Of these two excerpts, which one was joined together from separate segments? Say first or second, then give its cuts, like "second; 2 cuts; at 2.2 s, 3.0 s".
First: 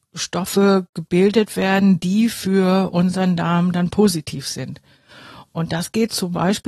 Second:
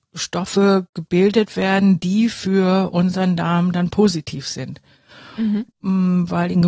second; 1 cut; at 5.3 s